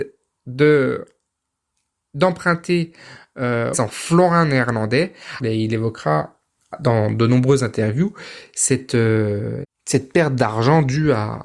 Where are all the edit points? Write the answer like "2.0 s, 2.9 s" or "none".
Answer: 3.7 s, 5.4 s, 9.6 s